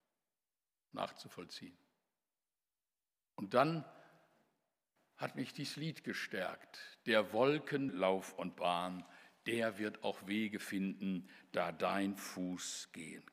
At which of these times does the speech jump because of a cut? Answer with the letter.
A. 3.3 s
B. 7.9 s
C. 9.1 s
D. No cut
B